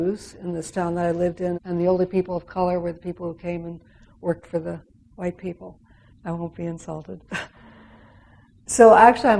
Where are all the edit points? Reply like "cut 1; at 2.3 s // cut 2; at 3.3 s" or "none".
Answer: cut 1; at 1.5 s // cut 2; at 6.1 s